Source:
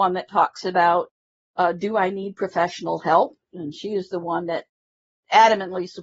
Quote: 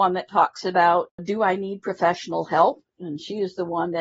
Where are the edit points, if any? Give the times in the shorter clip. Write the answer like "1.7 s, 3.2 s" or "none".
1.2 s